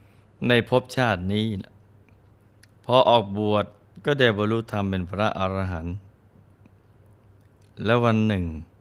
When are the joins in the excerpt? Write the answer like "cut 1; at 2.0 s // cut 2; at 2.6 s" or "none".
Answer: none